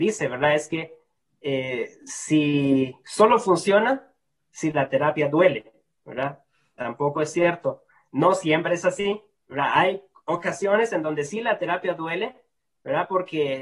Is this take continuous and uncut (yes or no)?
yes